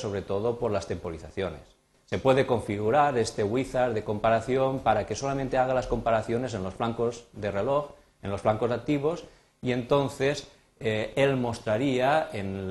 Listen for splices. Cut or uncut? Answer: uncut